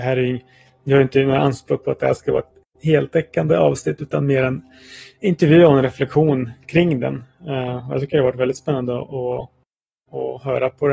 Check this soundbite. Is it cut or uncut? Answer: uncut